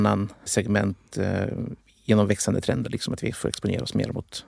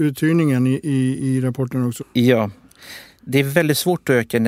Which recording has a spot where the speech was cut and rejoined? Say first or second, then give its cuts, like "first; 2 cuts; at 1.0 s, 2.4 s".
second; 1 cut; at 2.0 s